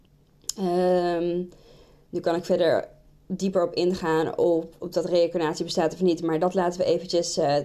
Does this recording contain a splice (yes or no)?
no